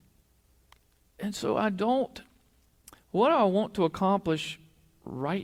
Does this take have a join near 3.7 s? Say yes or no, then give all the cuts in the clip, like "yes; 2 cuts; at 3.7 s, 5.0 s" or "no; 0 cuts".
no; 1 cut; at 1.1 s